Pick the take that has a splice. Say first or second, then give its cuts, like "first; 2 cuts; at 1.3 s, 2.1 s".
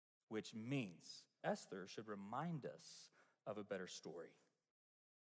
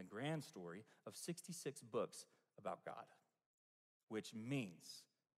first; 1 cut; at 1.4 s